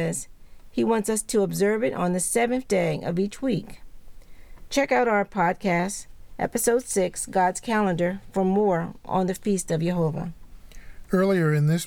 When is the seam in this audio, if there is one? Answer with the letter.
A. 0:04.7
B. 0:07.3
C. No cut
A